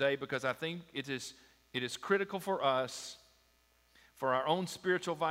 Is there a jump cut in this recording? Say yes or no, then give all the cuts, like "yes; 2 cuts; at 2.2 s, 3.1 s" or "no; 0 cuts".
no; 0 cuts